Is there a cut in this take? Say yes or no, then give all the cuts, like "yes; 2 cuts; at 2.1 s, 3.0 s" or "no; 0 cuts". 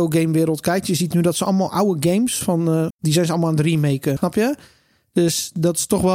yes; 2 cuts; at 2.9 s, 4.2 s